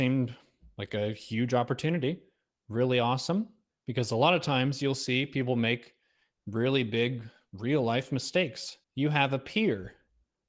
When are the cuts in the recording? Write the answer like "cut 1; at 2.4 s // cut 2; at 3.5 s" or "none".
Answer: cut 1; at 3.7 s // cut 2; at 8.8 s